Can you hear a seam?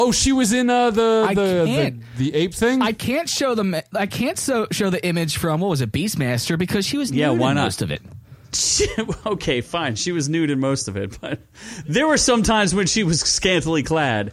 no; 0 cuts

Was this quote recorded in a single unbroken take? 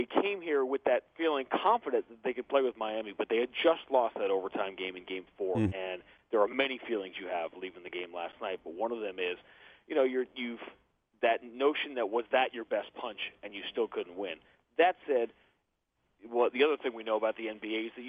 no; 1 cut; at 5.7 s

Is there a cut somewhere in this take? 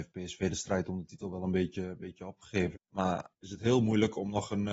yes; 1 cut; at 2.8 s

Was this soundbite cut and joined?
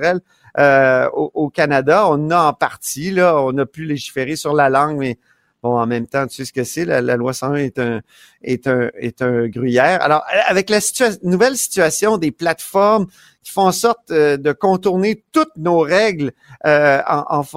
no; 0 cuts

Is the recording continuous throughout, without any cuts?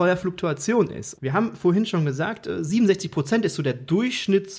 no; 1 cut; at 1.1 s

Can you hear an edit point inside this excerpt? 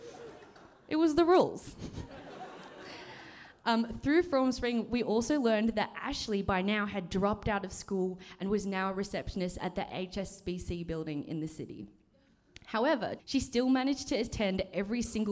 yes; 1 cut; at 13.2 s

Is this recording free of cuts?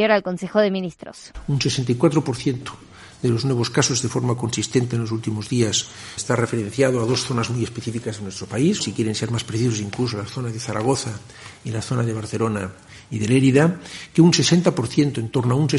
no; 2 cuts; at 6.2 s, 8.8 s

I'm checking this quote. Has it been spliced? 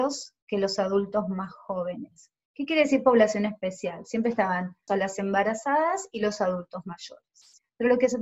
yes; 1 cut; at 4.9 s

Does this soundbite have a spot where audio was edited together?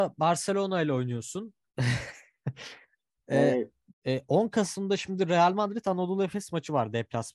yes; 2 cuts; at 1.7 s, 3.9 s

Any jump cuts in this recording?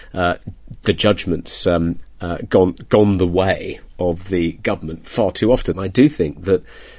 yes; 2 cuts; at 2.0 s, 5.7 s

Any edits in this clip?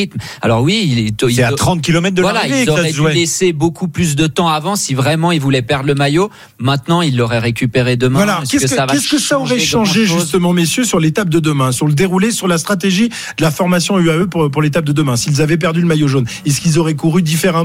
no; 0 cuts

